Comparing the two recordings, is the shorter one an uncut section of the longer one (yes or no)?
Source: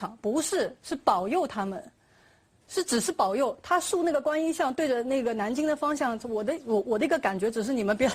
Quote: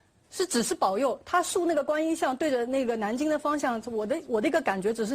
no